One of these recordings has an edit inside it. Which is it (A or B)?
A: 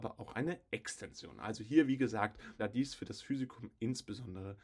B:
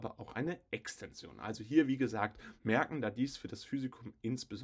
A